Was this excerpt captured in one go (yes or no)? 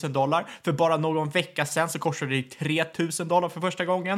yes